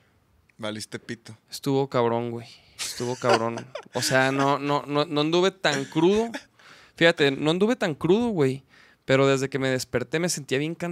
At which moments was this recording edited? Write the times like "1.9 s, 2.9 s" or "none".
none